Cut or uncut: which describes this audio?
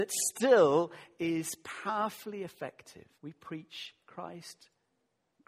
cut